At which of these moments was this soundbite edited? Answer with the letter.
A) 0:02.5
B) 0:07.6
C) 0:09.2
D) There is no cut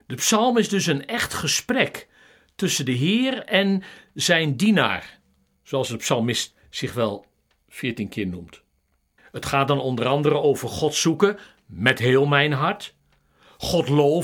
C